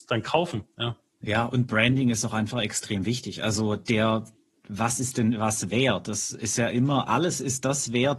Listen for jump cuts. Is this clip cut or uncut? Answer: uncut